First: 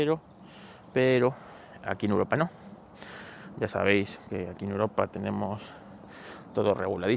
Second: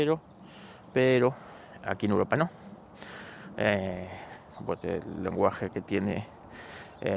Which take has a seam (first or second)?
second